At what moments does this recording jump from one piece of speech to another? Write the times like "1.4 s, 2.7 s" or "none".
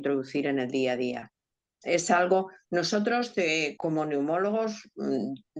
1.8 s, 3.8 s